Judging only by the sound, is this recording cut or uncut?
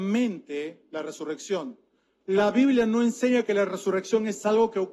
cut